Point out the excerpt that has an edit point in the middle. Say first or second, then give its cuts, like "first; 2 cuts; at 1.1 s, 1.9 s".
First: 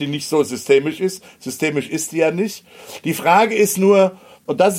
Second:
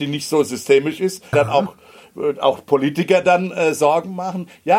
second; 1 cut; at 1.3 s